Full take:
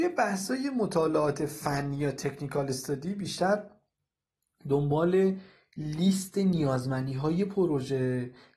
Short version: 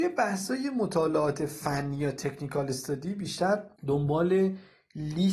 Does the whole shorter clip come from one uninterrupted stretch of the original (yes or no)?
no